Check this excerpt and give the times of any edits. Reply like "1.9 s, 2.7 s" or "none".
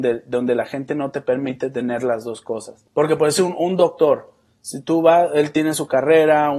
2.9 s